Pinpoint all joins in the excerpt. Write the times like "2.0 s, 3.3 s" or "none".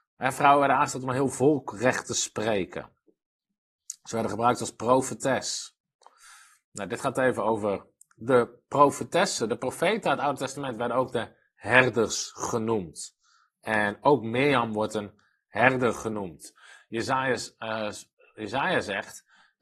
none